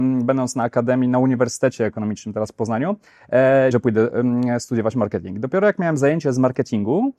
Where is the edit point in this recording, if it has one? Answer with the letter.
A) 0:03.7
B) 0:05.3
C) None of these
A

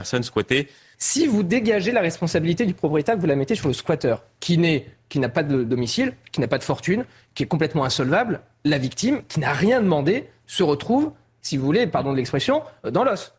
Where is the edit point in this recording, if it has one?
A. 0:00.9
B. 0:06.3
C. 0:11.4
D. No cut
A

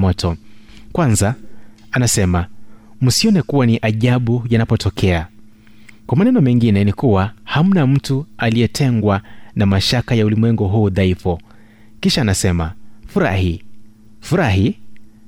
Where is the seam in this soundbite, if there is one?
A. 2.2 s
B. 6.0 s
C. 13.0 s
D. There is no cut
D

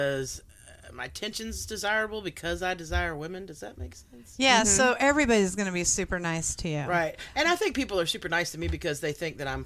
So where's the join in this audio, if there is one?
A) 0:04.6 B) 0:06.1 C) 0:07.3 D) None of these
D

